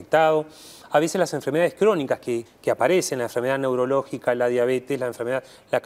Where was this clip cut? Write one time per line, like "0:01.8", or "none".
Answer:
0:02.5